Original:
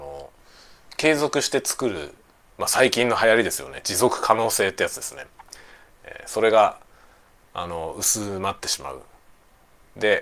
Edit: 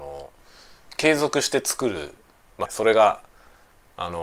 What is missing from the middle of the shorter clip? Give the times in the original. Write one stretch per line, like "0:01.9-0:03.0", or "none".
0:02.6-0:06.2